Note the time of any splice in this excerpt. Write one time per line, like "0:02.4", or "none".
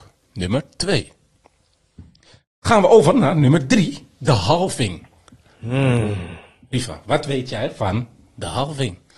none